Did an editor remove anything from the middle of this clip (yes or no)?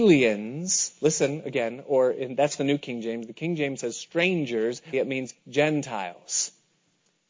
yes